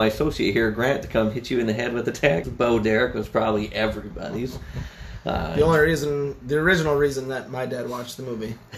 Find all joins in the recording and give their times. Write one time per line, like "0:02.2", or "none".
0:02.4